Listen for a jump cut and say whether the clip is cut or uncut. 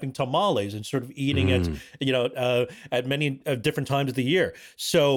uncut